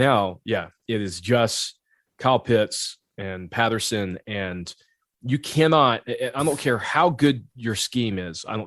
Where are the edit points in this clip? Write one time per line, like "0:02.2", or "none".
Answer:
none